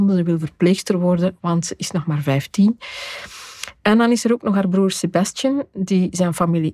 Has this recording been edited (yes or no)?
yes